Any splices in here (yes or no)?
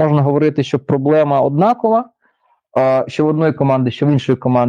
no